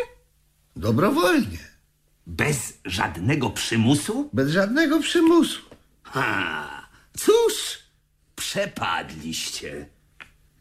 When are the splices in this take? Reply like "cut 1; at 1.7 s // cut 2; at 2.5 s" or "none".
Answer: none

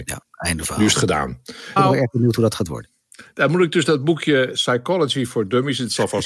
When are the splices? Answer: cut 1; at 1.8 s

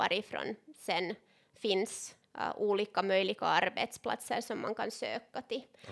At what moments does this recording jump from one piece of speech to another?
cut 1; at 2.2 s

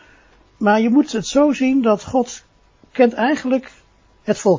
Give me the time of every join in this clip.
none

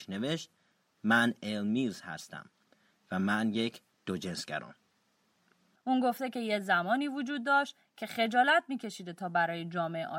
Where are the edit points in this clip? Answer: cut 1; at 5.8 s

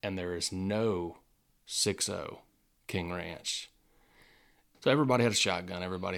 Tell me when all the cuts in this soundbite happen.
cut 1; at 4.7 s

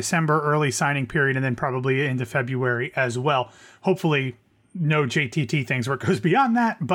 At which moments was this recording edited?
none

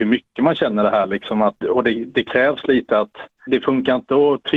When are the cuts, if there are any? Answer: cut 1; at 1.6 s // cut 2; at 3.5 s

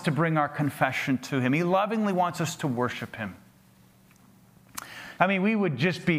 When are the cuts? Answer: cut 1; at 5.2 s

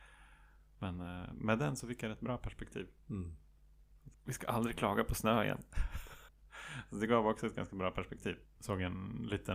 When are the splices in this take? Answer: cut 1; at 4.1 s // cut 2; at 6.3 s // cut 3; at 8.5 s

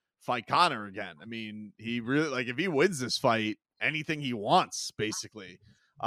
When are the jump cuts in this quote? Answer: none

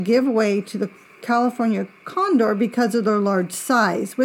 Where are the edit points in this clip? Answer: none

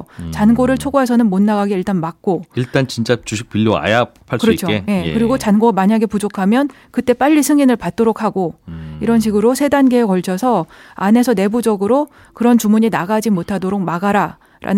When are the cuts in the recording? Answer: none

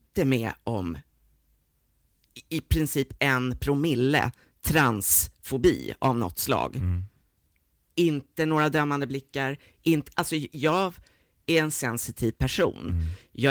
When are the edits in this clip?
none

